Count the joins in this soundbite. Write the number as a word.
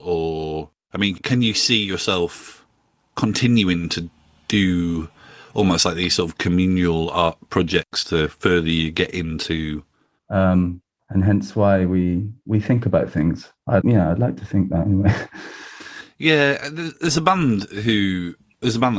two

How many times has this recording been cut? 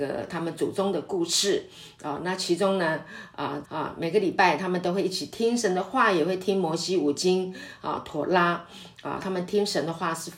two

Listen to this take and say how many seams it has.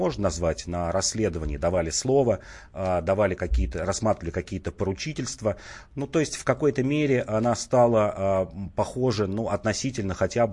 zero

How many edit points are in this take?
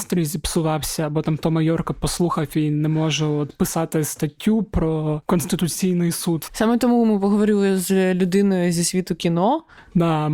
one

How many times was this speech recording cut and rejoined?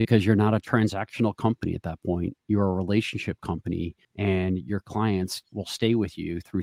two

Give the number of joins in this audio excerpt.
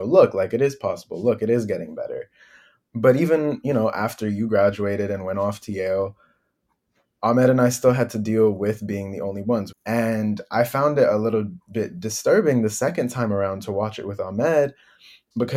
one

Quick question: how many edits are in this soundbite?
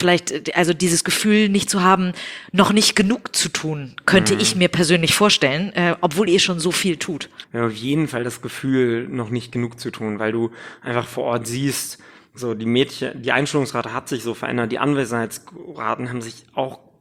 one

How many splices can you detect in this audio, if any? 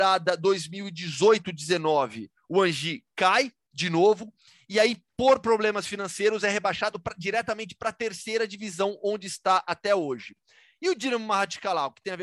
one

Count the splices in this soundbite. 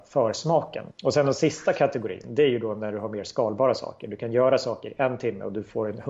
one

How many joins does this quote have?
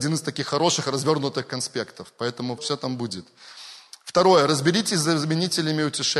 one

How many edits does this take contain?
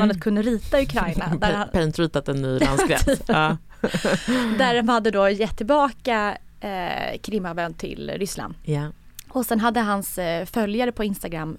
zero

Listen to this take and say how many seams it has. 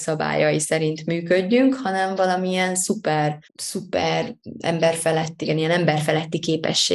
two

